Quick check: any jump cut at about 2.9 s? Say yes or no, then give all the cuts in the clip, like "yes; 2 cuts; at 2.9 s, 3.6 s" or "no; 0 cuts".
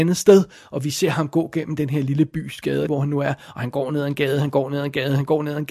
yes; 1 cut; at 2.9 s